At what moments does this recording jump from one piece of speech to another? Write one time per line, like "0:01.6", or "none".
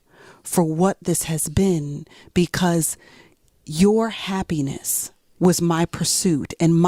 0:05.4